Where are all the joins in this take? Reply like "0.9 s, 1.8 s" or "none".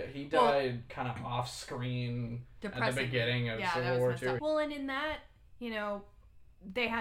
4.4 s